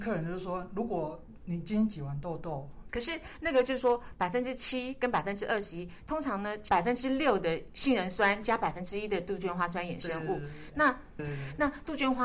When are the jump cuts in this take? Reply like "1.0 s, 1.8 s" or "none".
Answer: 2.9 s, 11.2 s